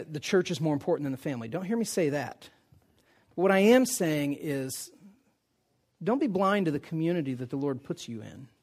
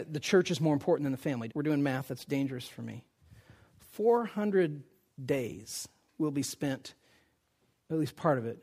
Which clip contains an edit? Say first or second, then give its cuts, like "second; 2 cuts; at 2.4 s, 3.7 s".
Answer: second; 1 cut; at 1.5 s